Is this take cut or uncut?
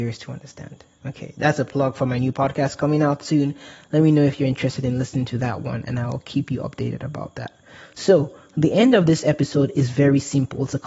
uncut